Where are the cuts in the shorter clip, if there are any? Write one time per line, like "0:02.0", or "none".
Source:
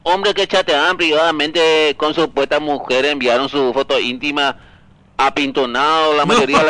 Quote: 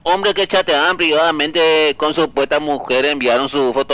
none